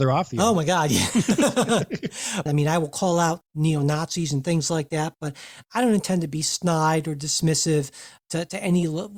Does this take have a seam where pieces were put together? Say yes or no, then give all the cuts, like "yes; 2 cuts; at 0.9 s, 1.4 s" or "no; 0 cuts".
yes; 1 cut; at 2.5 s